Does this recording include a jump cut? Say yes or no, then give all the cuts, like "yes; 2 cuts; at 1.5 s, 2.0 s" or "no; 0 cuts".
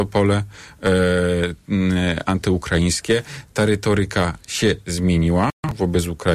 no; 0 cuts